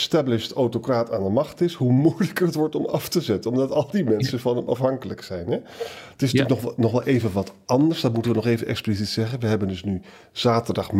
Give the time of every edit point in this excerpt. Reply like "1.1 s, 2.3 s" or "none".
none